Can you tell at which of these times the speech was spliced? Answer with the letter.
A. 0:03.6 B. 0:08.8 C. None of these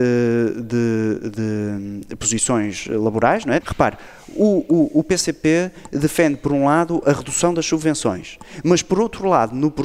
A